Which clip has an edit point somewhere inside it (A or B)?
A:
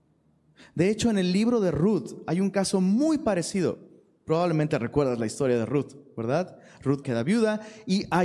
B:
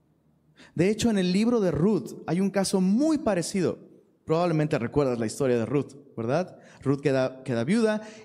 A